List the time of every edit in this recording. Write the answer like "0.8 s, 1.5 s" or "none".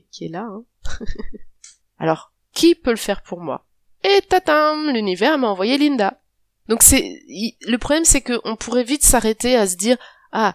1.8 s, 6.7 s